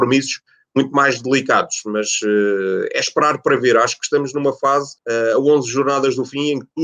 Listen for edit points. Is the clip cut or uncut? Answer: cut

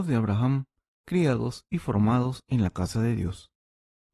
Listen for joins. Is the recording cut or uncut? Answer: cut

